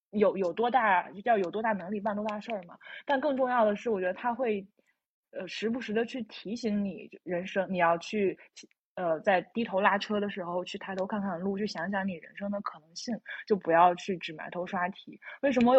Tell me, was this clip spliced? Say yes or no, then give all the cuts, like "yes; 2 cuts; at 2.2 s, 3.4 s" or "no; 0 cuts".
no; 0 cuts